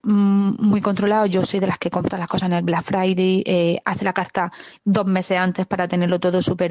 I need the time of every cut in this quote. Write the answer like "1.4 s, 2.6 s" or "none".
none